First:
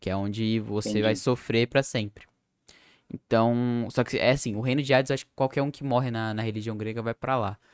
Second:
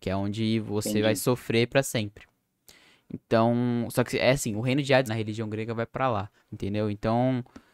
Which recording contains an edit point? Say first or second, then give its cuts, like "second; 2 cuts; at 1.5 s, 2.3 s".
second; 2 cuts; at 5.1 s, 6.4 s